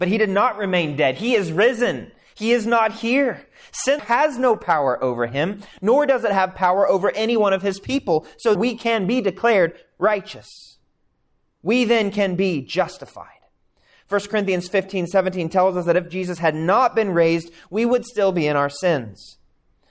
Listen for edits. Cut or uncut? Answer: cut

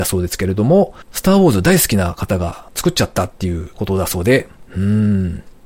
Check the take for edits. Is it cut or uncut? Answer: cut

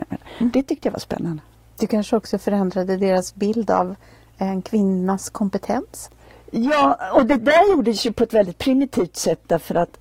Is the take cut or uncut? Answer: uncut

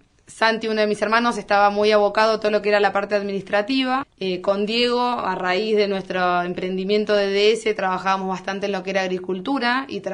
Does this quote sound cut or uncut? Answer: cut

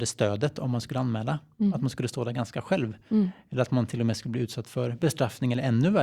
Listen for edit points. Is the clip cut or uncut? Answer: uncut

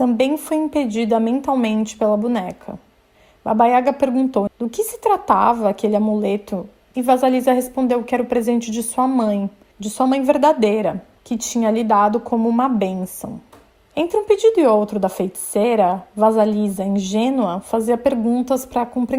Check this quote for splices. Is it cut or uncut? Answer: cut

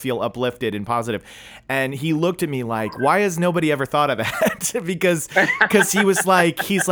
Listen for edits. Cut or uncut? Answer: uncut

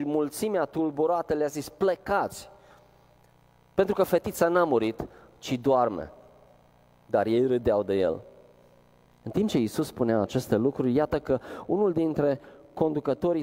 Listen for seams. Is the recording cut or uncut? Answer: cut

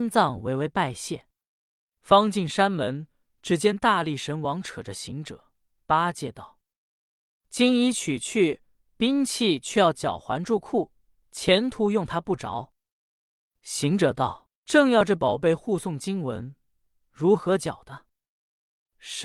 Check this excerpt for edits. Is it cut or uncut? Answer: cut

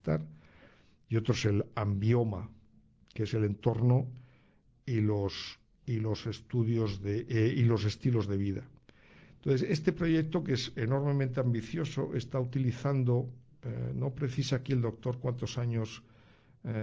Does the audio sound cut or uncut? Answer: uncut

